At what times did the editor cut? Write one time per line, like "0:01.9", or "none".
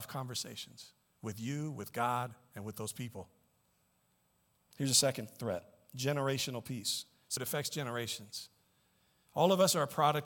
0:07.4